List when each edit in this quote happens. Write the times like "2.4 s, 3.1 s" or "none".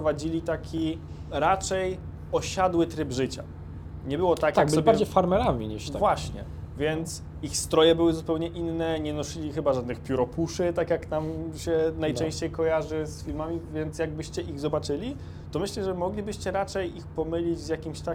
none